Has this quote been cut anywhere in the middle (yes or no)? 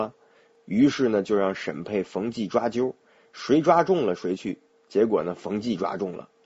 no